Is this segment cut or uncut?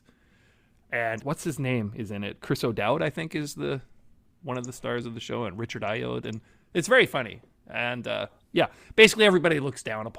cut